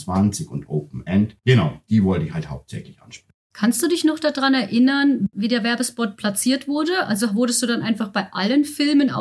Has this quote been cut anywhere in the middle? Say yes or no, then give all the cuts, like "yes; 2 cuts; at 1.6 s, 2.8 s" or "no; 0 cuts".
no; 0 cuts